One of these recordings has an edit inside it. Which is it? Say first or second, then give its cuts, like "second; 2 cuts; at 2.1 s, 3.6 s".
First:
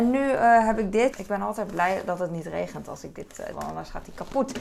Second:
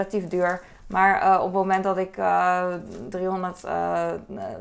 first; 2 cuts; at 1.1 s, 3.5 s